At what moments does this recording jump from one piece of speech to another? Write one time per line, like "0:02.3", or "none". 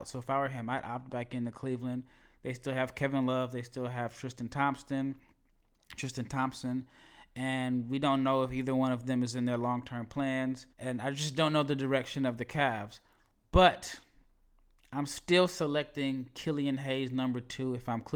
0:10.7